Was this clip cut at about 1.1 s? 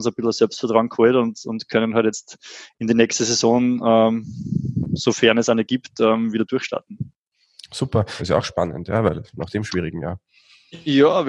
no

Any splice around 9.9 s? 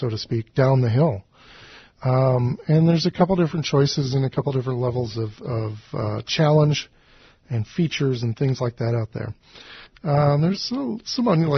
yes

